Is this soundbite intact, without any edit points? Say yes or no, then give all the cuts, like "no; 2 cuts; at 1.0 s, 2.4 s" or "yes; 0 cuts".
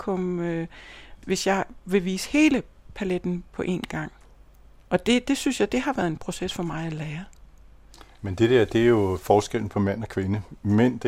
yes; 0 cuts